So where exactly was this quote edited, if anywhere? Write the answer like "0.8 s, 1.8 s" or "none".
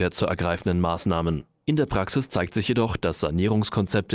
none